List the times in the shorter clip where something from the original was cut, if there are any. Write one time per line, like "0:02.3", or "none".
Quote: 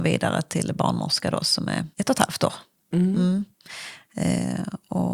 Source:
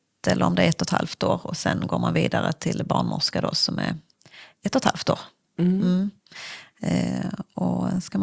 0:01.9